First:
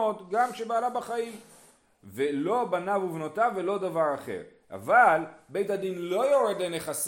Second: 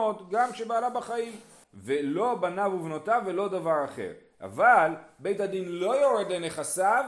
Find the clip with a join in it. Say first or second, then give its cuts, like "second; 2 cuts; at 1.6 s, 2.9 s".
second; 1 cut; at 1.6 s